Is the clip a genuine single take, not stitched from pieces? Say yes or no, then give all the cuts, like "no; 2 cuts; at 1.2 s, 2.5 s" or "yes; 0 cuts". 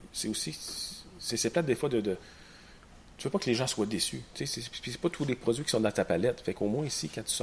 yes; 0 cuts